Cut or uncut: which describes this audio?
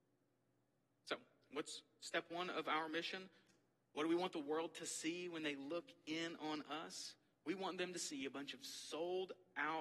uncut